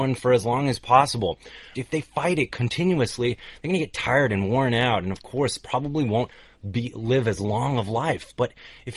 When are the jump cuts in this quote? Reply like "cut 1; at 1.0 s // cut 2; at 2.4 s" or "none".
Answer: cut 1; at 1.7 s